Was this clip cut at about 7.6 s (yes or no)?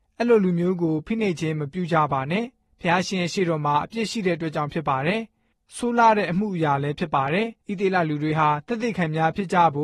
yes